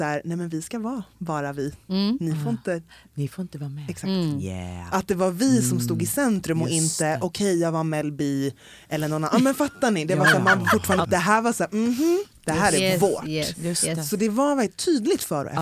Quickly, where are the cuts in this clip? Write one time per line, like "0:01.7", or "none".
0:11.0